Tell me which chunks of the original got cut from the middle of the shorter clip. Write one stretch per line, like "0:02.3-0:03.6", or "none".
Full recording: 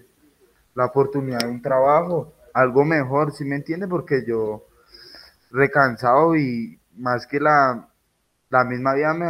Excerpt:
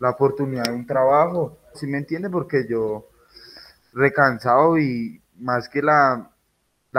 0:02.5-0:03.3